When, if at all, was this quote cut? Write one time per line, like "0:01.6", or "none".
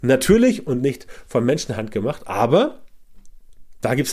none